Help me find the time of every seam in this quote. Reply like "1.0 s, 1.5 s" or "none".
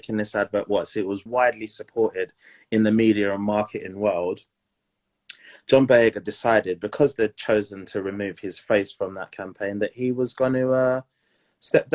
1.3 s